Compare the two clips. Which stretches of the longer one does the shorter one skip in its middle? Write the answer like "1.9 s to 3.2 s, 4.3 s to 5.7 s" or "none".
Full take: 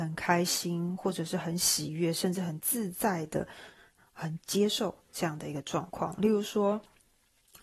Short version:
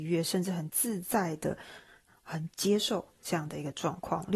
none